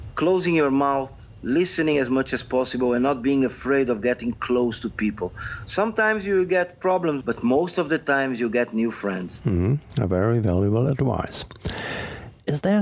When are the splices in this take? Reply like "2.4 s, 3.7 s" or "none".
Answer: 7.2 s, 9.4 s